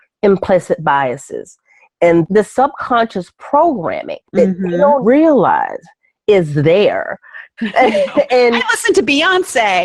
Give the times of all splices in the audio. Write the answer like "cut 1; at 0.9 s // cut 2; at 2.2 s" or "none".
cut 1; at 5.0 s // cut 2; at 7.6 s